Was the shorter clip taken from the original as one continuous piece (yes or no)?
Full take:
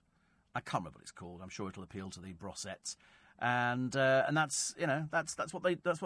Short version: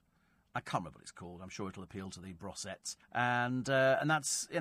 no